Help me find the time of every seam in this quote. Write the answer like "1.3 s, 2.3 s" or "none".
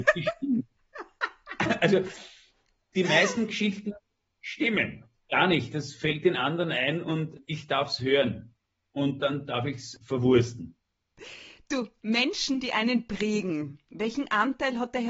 5.1 s